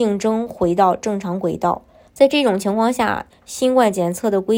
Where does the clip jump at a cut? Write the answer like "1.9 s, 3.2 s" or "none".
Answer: 2.1 s, 3.3 s